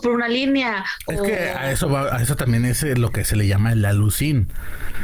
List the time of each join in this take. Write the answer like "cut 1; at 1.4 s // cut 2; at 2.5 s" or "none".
none